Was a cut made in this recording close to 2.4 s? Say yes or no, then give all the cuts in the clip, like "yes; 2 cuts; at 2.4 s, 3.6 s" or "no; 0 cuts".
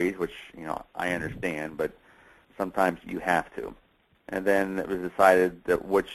no; 1 cut; at 4.1 s